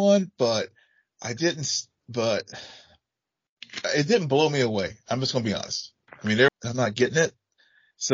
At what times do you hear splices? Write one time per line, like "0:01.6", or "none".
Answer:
0:06.5